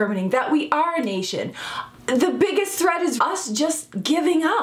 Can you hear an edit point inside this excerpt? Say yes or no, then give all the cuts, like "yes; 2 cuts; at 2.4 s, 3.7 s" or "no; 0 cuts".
yes; 2 cuts; at 2.0 s, 3.2 s